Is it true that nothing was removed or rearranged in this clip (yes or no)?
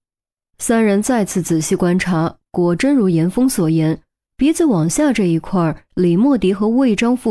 yes